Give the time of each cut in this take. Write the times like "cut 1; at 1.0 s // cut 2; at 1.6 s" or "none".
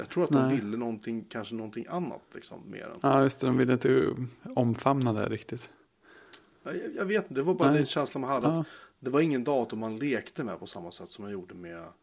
none